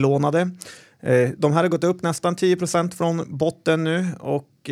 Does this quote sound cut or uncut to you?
uncut